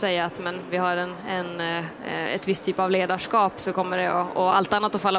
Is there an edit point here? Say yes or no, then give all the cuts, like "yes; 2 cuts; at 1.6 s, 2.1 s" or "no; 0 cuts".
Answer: no; 0 cuts